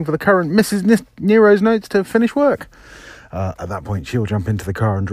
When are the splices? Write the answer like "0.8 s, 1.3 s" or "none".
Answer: none